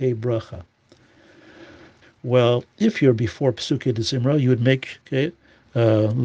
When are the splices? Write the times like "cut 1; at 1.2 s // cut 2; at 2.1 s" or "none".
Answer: cut 1; at 2.0 s // cut 2; at 5.0 s